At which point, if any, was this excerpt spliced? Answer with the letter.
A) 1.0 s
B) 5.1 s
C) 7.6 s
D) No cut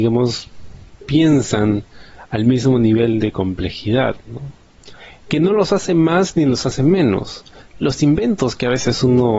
C